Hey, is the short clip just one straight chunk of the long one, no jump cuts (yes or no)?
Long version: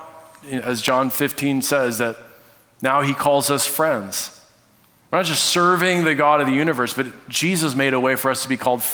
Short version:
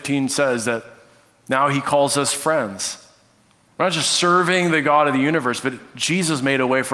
yes